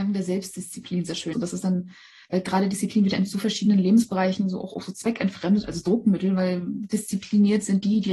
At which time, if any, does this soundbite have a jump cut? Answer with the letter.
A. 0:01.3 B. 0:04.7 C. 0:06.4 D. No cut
A